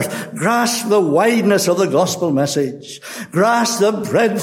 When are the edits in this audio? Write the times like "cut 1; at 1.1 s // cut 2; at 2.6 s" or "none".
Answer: none